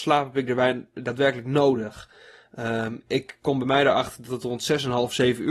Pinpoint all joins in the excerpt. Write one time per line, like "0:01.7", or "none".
none